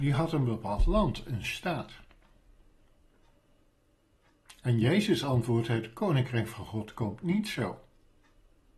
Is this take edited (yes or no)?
no